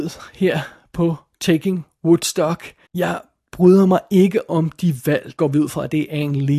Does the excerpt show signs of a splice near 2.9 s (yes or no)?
yes